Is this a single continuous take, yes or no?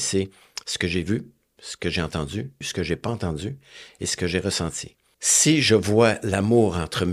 no